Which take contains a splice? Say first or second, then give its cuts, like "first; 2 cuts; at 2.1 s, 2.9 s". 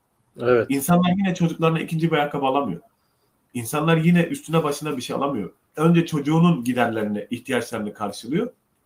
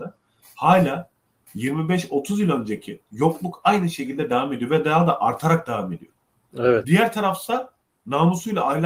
second; 2 cuts; at 3.0 s, 6.8 s